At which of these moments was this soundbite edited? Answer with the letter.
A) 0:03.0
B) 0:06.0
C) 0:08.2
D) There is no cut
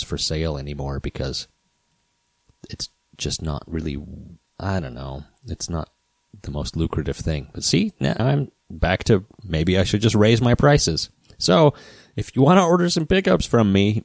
C